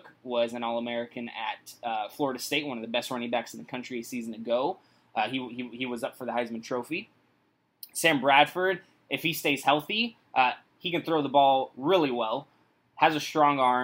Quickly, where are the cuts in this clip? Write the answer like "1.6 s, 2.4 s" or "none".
none